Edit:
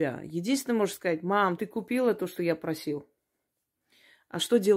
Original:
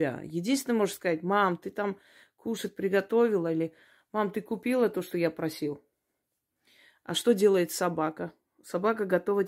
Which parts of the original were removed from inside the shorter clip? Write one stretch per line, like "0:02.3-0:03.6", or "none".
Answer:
0:01.6-0:04.3